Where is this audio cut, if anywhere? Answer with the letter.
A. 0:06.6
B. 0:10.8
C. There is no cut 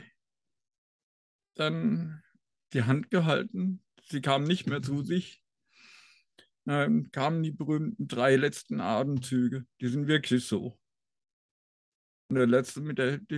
C